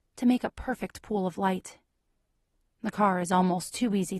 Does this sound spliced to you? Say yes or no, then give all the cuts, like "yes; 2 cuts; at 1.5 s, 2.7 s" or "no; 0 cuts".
no; 0 cuts